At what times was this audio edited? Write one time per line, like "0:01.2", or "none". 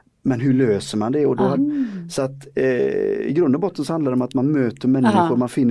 0:01.5